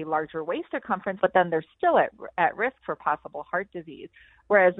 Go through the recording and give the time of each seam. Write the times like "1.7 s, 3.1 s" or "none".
1.2 s